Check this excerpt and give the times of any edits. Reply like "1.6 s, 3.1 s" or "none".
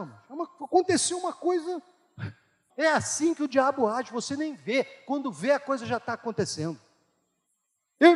2.7 s